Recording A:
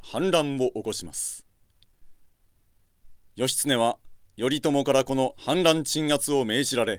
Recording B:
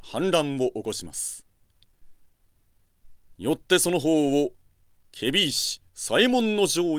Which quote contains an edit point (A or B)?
B